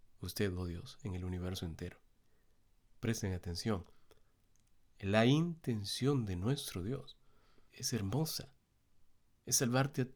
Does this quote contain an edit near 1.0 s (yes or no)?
no